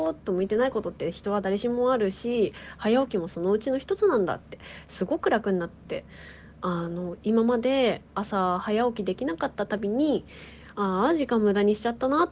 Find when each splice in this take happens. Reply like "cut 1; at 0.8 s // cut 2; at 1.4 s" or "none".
none